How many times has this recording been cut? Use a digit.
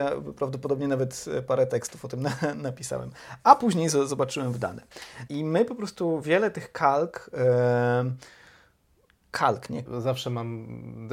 2